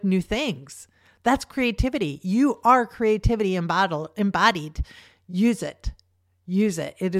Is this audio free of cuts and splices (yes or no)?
yes